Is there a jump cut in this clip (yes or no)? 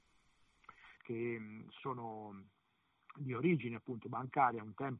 yes